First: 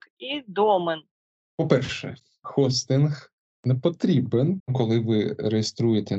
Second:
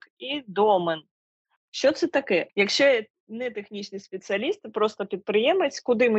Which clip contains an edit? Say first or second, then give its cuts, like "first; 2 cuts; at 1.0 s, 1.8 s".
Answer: first; 2 cuts; at 1.4 s, 4.6 s